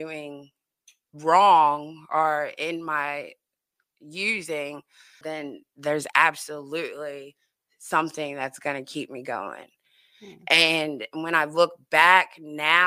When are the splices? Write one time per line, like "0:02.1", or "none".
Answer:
0:05.2